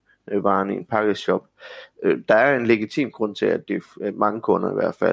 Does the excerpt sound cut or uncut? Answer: uncut